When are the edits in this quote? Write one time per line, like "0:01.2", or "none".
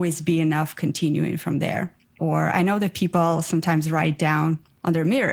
0:02.2